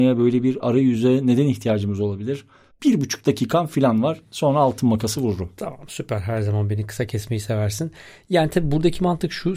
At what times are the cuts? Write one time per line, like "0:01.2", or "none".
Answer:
0:02.7